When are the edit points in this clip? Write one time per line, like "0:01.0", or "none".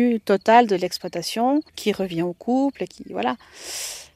0:01.7